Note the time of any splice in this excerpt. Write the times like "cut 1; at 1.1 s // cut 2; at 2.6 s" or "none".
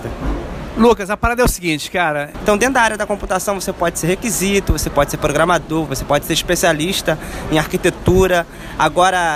cut 1; at 2.3 s // cut 2; at 5.9 s